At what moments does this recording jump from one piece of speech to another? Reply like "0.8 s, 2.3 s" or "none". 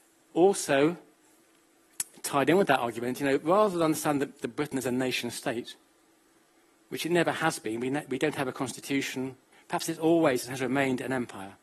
9.5 s